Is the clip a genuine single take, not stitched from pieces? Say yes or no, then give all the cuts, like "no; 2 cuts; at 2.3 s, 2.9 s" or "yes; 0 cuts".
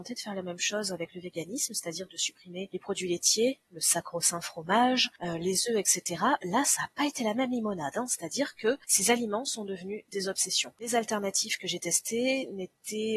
no; 1 cut; at 2.1 s